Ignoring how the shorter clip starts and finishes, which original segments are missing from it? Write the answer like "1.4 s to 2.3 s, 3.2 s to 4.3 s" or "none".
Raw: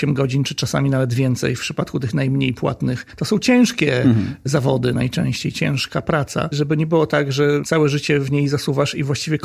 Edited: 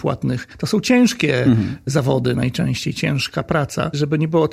none